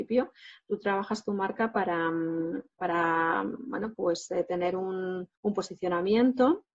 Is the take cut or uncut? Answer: cut